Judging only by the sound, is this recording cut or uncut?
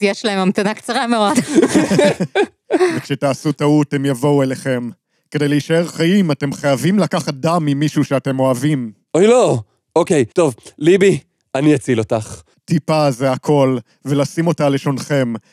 cut